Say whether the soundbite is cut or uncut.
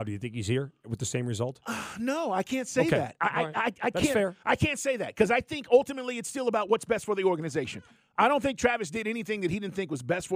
uncut